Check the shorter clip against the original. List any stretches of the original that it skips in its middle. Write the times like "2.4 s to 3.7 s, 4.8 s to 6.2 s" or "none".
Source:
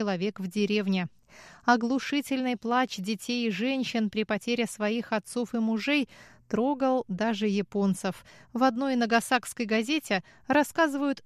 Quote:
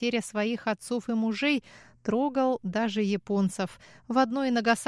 none